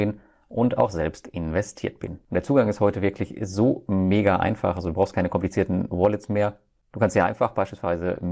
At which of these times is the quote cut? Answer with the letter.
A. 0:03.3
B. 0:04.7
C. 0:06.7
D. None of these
D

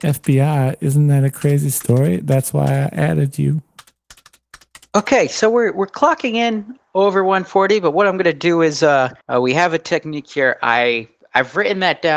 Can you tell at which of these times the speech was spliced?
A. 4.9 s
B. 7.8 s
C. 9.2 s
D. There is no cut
C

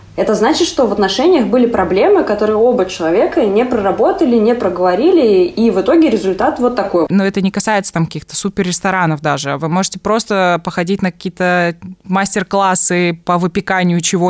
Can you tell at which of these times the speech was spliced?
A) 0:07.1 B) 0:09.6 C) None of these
A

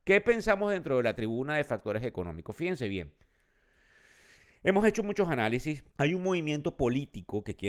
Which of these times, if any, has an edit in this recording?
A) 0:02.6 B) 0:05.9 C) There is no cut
B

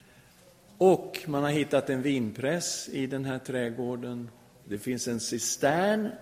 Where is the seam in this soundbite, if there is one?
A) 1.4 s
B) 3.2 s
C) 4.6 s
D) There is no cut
C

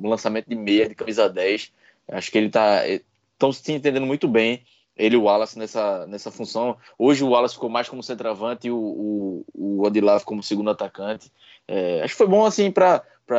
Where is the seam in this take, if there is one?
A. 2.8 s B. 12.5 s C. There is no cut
C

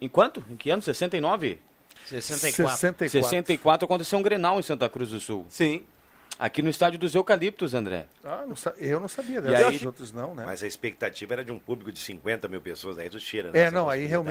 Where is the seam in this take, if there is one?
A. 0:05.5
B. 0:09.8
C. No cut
B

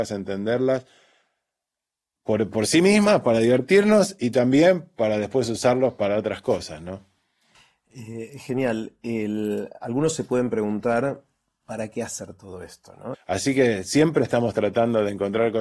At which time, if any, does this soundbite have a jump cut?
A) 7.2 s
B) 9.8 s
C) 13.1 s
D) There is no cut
C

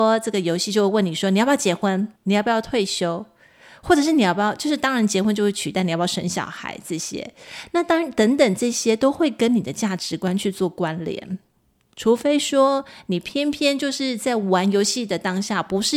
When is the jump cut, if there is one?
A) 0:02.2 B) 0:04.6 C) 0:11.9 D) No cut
A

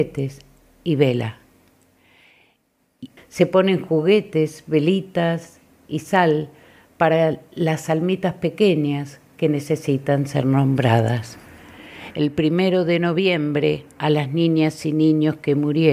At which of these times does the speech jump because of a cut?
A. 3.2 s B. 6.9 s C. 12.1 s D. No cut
A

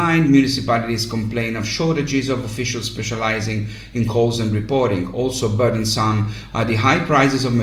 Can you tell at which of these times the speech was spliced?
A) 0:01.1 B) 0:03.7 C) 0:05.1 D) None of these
D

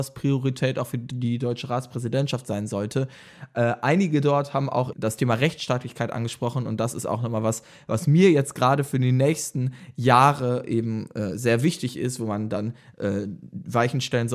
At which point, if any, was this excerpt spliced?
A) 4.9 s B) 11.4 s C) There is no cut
A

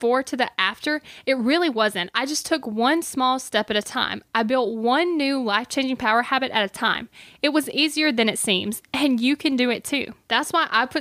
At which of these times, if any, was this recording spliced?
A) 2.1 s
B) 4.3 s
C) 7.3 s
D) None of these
D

